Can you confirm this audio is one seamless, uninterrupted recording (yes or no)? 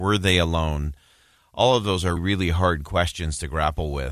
no